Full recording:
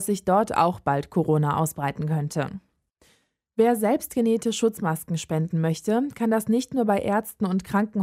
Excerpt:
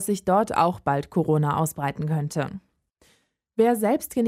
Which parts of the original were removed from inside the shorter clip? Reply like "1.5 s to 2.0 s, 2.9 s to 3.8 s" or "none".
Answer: none

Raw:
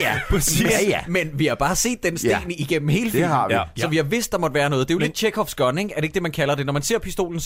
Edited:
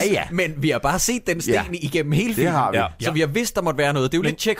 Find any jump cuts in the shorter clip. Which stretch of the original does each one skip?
none

